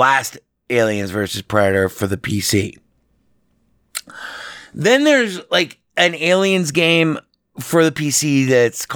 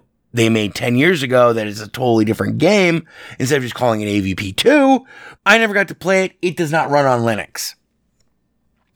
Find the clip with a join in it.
second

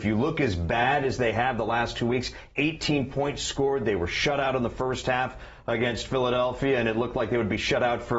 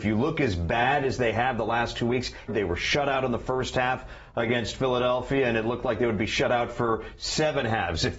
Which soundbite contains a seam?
second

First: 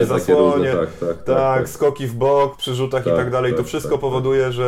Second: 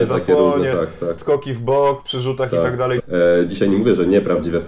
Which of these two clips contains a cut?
second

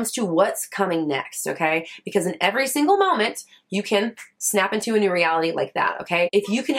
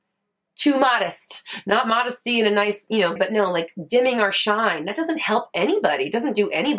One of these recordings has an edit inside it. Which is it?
second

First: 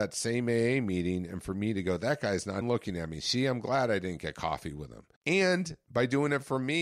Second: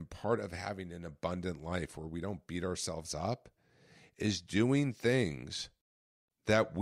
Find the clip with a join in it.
first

